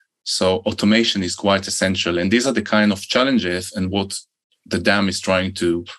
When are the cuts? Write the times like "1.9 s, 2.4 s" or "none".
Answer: none